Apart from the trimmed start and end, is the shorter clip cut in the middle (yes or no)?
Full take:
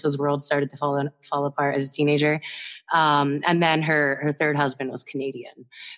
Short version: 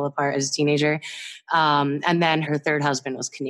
yes